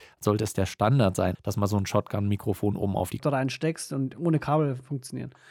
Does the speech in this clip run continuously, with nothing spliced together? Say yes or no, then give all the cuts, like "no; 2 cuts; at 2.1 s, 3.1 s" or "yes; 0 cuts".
no; 2 cuts; at 1.4 s, 3.2 s